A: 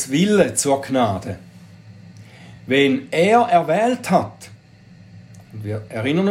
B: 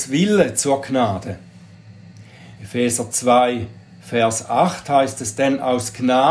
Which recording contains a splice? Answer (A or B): B